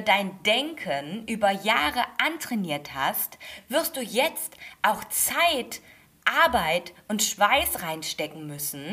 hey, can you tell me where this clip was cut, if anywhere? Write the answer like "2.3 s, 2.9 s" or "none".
none